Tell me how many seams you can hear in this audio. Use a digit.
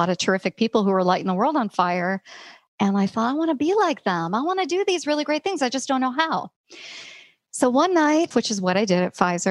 1